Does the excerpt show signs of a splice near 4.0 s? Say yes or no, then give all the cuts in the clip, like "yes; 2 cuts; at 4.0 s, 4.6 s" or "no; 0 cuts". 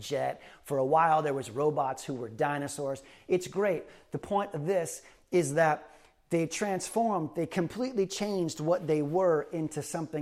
no; 0 cuts